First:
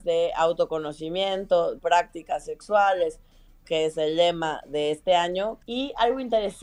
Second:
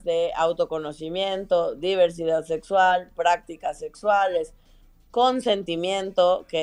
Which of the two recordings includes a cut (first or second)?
first